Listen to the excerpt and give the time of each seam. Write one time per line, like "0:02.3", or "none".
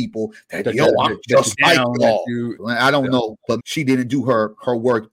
0:02.6
0:03.6